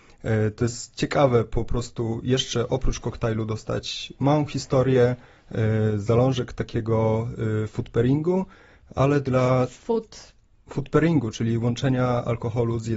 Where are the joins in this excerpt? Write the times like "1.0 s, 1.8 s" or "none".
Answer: none